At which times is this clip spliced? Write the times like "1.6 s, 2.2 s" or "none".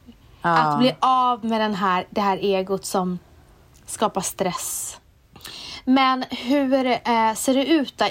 none